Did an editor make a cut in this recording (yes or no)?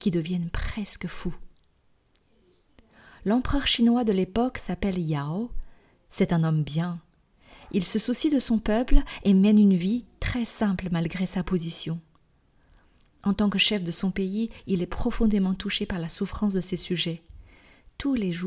no